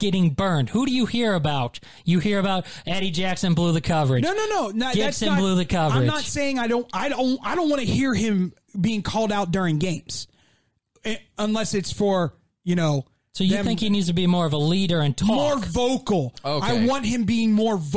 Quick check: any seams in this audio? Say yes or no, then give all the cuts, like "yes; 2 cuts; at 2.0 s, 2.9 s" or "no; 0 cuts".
no; 0 cuts